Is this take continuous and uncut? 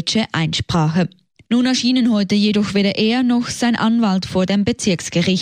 yes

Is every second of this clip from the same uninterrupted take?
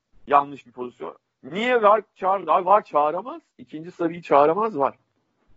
yes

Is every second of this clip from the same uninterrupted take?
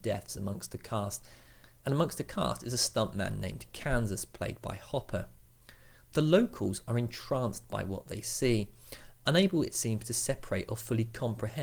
yes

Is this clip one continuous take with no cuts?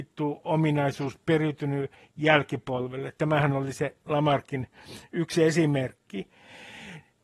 yes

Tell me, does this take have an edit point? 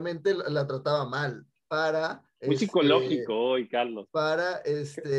yes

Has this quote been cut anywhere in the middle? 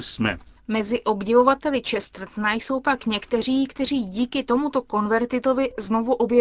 no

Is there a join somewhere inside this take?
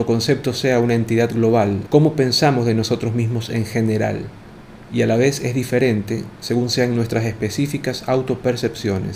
yes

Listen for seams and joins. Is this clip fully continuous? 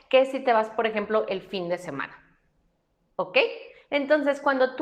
yes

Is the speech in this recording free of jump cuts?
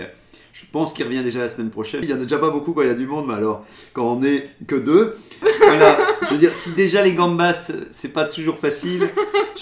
no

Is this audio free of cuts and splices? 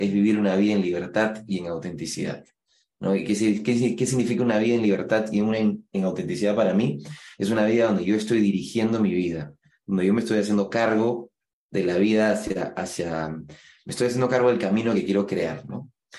yes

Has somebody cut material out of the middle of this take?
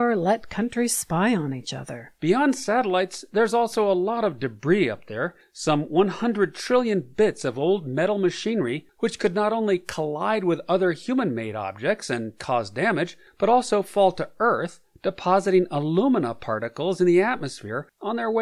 no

